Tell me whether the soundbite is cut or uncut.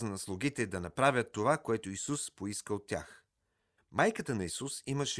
cut